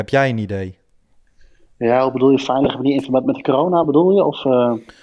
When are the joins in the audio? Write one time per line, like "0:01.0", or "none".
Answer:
none